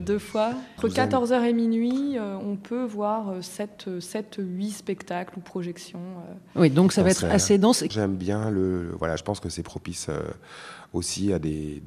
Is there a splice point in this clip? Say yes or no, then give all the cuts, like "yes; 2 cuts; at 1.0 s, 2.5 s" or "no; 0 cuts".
yes; 2 cuts; at 7.9 s, 9.2 s